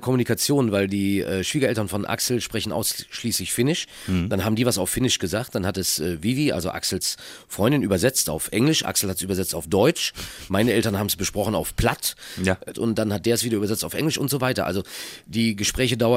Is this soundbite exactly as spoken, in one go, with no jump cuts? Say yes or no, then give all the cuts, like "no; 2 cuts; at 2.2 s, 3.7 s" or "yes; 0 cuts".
no; 1 cut; at 12.7 s